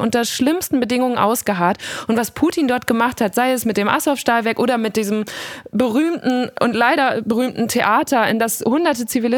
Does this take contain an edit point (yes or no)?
no